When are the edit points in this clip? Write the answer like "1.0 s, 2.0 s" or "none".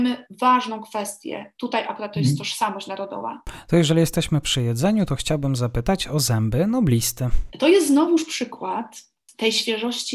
7.5 s

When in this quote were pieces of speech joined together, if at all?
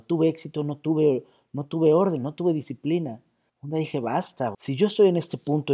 3.5 s, 4.5 s

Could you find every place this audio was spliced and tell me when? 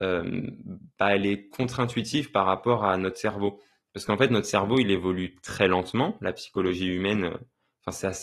none

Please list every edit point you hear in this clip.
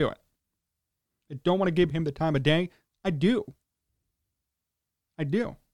none

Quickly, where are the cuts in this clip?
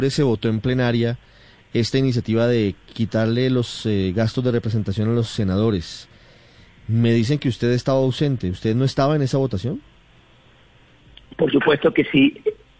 none

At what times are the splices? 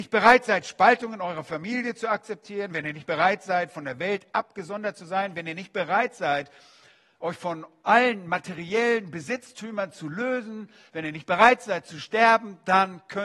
none

